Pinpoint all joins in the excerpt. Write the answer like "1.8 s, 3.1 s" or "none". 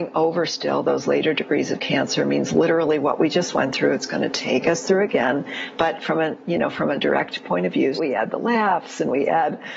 7.9 s